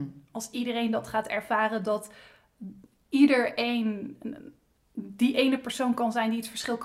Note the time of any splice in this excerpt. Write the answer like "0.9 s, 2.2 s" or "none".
none